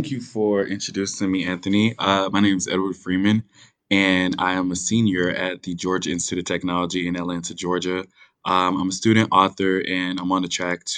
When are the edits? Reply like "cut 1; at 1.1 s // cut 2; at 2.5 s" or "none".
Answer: none